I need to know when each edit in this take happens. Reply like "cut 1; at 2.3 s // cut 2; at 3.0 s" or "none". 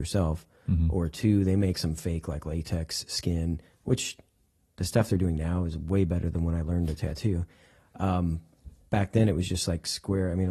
cut 1; at 1.7 s